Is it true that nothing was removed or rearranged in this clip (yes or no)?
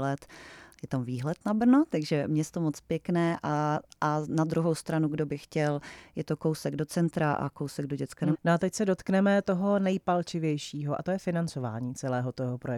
no